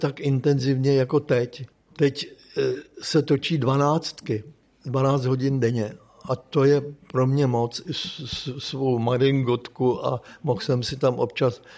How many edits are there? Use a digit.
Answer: 1